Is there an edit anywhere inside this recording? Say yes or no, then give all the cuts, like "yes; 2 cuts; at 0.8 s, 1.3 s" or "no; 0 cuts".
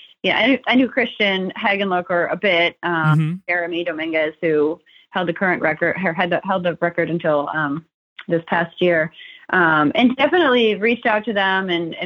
no; 0 cuts